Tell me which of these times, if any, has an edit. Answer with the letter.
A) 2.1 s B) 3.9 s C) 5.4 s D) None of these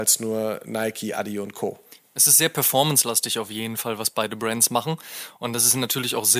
D